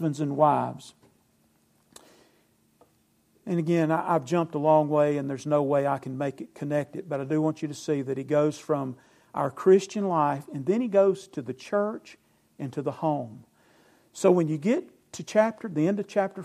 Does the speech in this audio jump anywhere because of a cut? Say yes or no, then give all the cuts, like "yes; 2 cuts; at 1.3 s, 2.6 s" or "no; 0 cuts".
no; 0 cuts